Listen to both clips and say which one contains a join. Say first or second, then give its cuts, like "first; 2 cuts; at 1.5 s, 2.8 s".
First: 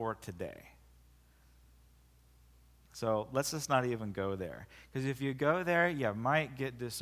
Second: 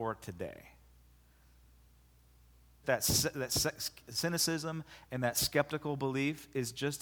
second; 1 cut; at 2.8 s